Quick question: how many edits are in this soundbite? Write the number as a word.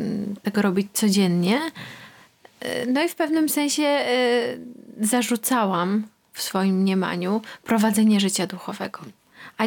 zero